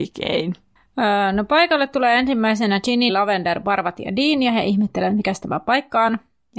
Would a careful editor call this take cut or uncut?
cut